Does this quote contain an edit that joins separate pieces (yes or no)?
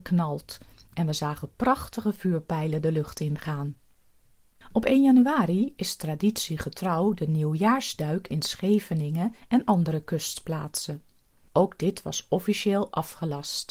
no